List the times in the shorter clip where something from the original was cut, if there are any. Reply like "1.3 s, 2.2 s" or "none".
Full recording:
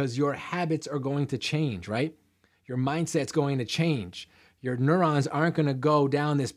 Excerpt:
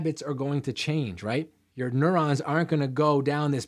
1.7 s